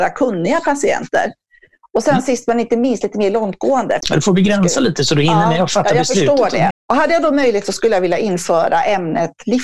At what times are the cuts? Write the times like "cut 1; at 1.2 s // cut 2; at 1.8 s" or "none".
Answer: cut 1; at 1.9 s // cut 2; at 4.0 s // cut 3; at 6.7 s